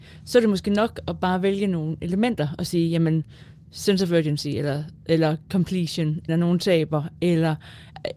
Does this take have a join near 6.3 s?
yes; 1 cut; at 6.3 s

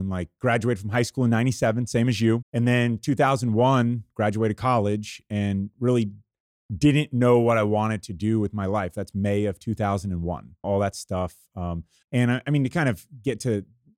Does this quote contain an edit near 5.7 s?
no; 3 cuts; at 2.4 s, 10.6 s, 12.0 s

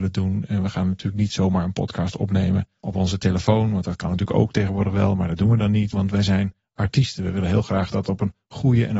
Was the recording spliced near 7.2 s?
no; 1 cut; at 5.9 s

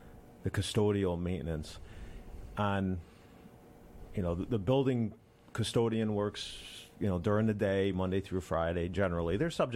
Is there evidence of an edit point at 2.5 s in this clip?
no; 0 cuts

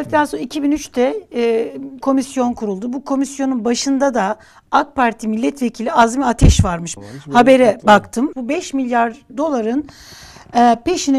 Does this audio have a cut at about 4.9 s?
no; 3 cuts; at 2.0 s, 7.0 s, 8.3 s

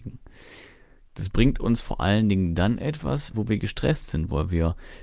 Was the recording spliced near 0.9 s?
no; 1 cut; at 3.3 s

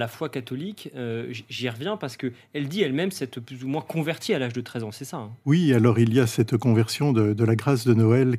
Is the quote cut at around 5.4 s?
yes; 1 cut; at 5.4 s

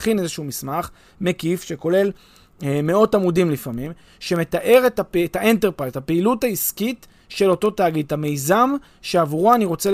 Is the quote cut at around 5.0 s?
no; 0 cuts

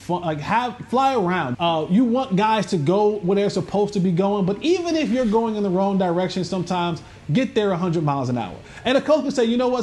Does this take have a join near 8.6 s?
yes; 2 cuts; at 1.5 s, 8.6 s

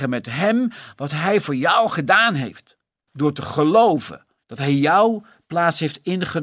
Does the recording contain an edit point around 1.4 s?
no; 2 cuts; at 3.1 s, 4.4 s

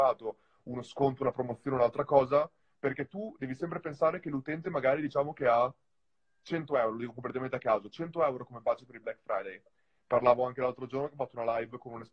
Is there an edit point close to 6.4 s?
no; 1 cut; at 10.0 s

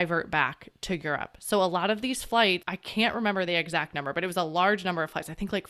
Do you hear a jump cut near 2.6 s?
yes; 1 cut; at 2.6 s

